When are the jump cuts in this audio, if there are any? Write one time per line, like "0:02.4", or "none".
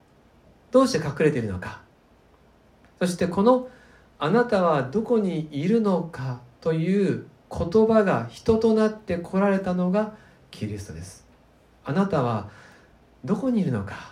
0:11.8